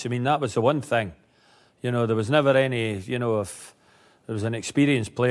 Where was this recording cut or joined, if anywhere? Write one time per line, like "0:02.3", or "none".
none

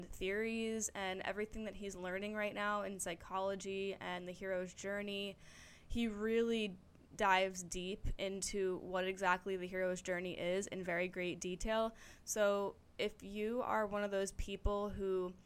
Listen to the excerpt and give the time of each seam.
none

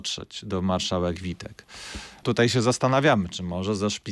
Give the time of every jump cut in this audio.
0:02.2

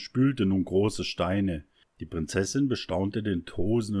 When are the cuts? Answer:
0:01.9

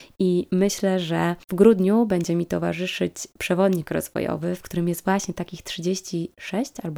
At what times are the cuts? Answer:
0:01.4

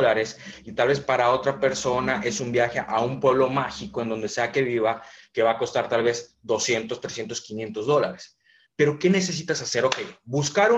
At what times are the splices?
none

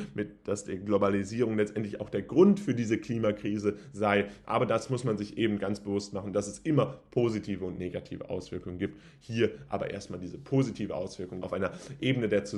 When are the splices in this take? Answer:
0:11.4

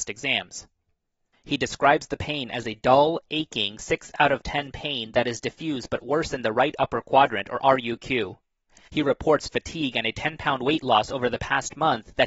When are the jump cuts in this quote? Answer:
0:01.3
0:08.9

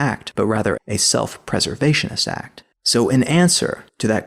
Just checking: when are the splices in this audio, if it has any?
0:02.7

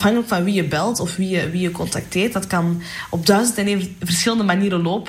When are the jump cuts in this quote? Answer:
none

